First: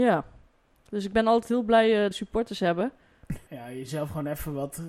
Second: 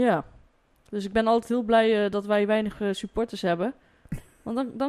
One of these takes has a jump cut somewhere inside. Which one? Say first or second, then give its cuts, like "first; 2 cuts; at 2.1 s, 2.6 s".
first; 2 cuts; at 2.1 s, 3.5 s